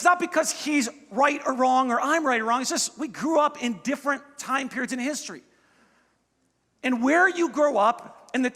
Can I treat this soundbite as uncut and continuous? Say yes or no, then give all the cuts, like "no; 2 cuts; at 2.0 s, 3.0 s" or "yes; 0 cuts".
yes; 0 cuts